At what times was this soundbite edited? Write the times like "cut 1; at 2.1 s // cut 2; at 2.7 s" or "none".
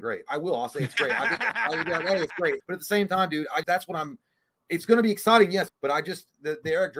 cut 1; at 2.6 s // cut 2; at 3.6 s // cut 3; at 5.7 s